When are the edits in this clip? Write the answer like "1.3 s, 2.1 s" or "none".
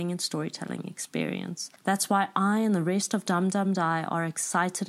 none